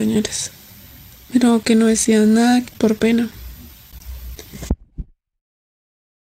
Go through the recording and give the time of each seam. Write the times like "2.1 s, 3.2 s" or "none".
2.7 s